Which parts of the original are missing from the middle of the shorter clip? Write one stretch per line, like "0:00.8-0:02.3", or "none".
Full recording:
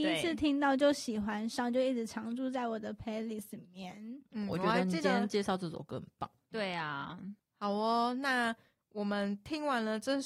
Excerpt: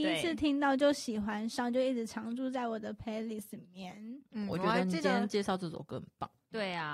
none